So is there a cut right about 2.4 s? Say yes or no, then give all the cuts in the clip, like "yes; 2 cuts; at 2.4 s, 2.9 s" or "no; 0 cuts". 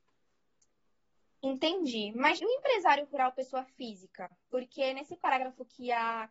yes; 1 cut; at 2.4 s